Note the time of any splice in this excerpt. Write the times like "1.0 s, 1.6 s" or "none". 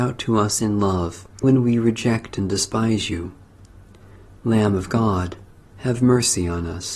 1.4 s